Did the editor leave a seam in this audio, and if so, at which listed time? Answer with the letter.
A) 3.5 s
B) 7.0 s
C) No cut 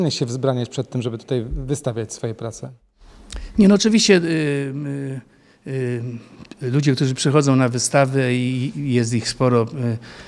C